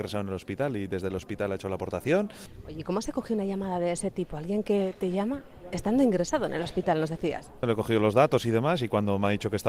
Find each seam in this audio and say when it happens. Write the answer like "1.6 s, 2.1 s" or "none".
none